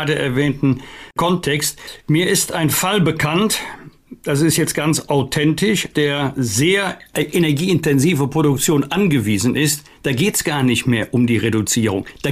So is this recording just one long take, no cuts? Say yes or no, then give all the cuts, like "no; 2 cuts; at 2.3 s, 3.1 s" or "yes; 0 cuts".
no; 1 cut; at 5.9 s